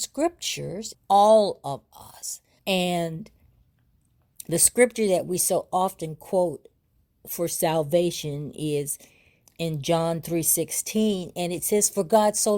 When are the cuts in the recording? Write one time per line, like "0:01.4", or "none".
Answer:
0:00.9
0:02.6